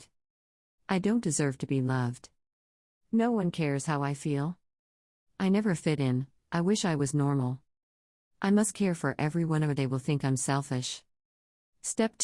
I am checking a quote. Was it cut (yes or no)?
no